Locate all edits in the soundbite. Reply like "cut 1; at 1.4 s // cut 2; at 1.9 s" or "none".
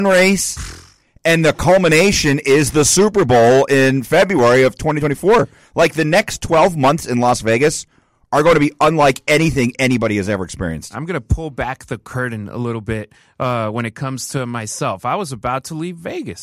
none